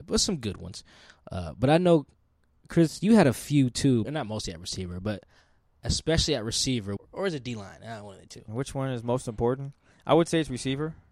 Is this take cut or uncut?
cut